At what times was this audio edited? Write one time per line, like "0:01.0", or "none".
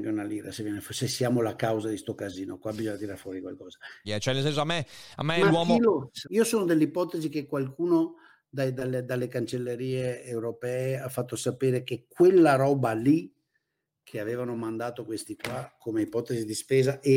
0:04.0
0:06.2